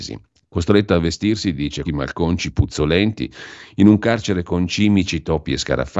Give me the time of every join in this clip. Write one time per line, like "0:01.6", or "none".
0:01.8